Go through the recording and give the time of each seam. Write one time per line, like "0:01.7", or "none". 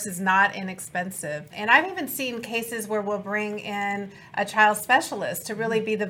0:01.5